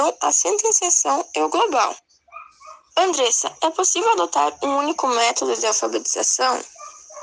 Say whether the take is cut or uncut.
uncut